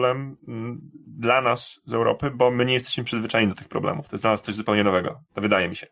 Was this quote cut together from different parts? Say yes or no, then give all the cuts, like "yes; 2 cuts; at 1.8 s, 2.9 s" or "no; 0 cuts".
no; 0 cuts